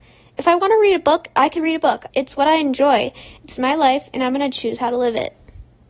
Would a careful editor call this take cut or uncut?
cut